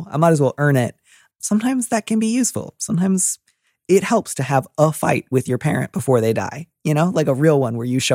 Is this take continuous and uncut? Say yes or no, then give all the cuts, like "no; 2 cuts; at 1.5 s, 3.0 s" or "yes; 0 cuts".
yes; 0 cuts